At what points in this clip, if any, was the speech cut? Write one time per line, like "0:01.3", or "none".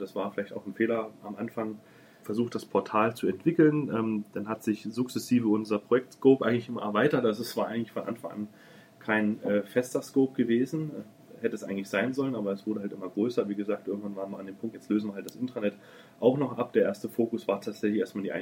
0:02.2
0:14.7